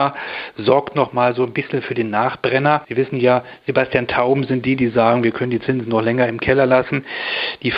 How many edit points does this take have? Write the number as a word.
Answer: one